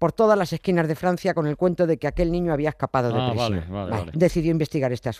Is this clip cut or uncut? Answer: cut